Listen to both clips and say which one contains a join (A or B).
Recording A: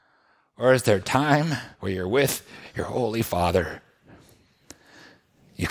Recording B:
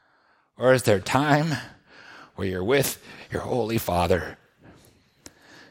A